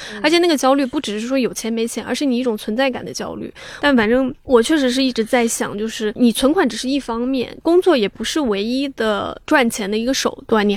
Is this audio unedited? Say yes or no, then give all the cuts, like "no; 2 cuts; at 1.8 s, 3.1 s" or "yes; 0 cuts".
no; 1 cut; at 3.8 s